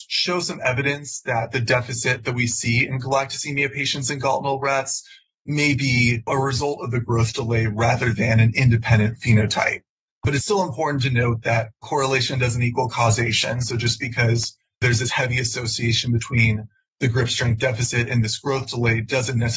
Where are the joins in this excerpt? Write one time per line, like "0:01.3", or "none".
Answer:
none